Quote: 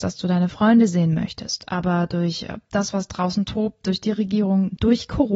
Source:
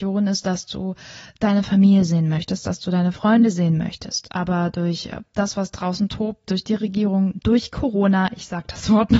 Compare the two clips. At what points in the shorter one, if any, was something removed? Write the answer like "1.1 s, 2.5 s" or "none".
none